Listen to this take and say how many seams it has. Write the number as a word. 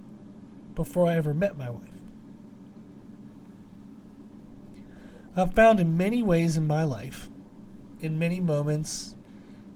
zero